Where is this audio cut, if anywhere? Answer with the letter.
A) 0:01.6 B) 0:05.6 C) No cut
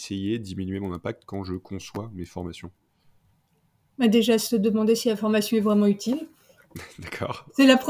C